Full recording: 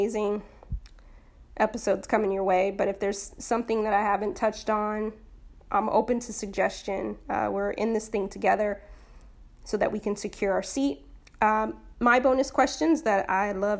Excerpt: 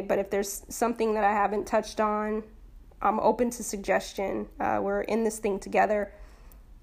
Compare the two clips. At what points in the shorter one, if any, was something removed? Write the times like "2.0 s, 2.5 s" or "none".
none